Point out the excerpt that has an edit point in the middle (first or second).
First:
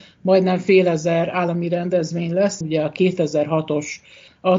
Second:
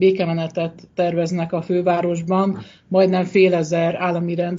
first